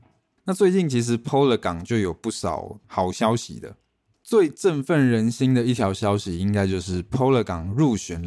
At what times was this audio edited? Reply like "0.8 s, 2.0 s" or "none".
none

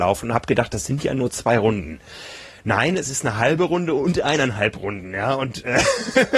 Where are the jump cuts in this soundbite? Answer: none

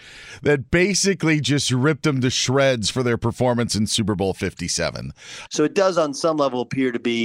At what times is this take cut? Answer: 5.5 s

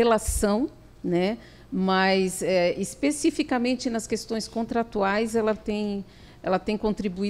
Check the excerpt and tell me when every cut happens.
none

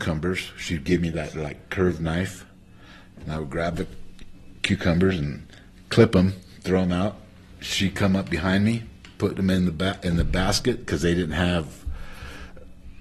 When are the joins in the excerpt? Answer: none

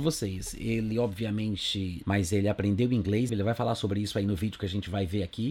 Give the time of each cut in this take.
2.0 s, 3.3 s

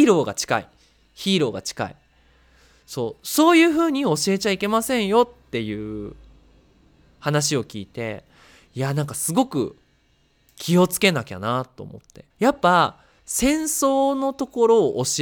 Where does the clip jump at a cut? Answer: 12.3 s

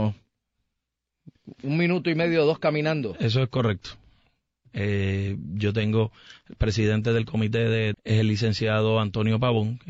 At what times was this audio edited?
4.6 s, 7.9 s

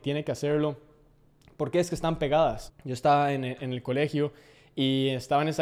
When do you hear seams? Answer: 2.7 s

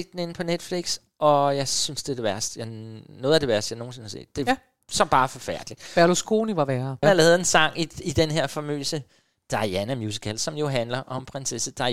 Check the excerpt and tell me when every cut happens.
7.0 s

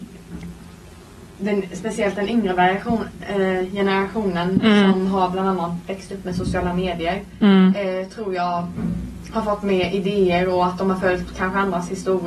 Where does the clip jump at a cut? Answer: none

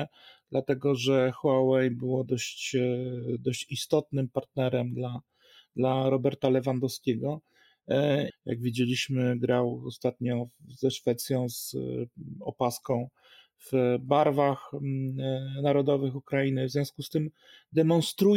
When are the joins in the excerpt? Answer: 8.3 s

